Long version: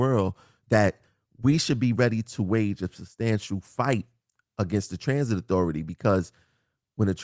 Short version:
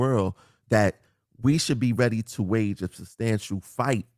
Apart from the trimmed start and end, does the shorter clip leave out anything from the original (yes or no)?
no